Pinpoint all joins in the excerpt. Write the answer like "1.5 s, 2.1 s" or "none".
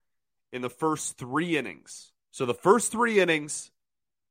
2.2 s